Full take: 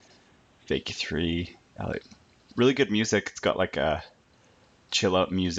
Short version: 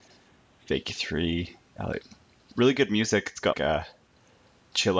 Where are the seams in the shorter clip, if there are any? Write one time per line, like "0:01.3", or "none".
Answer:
0:03.5